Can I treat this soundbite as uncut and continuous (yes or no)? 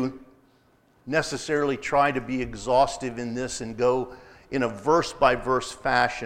yes